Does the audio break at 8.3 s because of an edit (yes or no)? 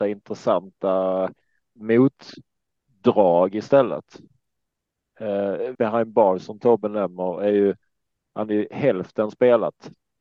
no